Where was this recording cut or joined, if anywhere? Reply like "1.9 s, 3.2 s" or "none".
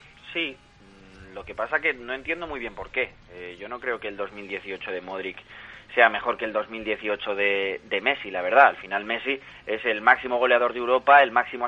none